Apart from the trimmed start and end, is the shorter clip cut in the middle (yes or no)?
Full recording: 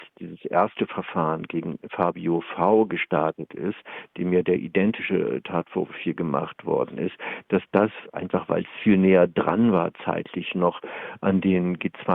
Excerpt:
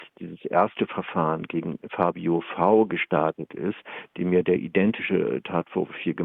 no